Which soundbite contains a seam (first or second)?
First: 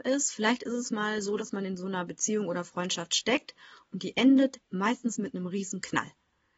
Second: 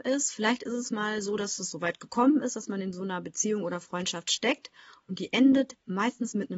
first